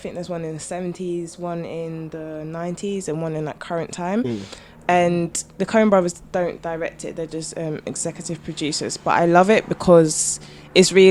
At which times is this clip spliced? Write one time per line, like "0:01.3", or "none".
none